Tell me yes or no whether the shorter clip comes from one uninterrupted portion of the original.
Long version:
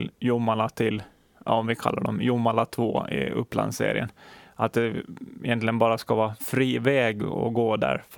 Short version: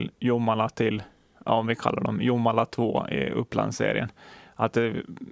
yes